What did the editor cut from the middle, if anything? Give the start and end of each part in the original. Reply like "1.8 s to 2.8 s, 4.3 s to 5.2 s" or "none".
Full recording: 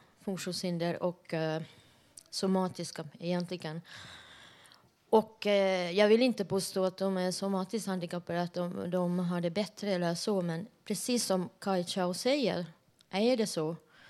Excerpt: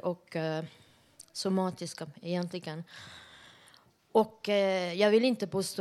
none